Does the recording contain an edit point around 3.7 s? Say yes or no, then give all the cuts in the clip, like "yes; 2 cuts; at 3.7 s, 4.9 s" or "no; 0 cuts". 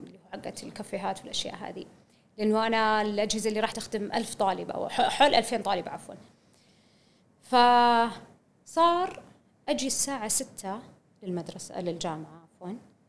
yes; 1 cut; at 3.7 s